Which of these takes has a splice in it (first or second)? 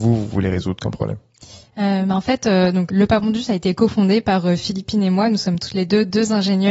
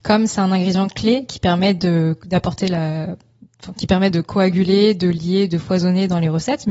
first